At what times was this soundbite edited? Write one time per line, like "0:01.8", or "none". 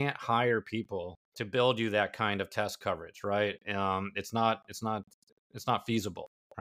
0:01.2